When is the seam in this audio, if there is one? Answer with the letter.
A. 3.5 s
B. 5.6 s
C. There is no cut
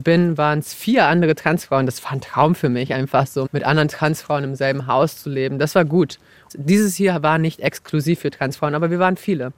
A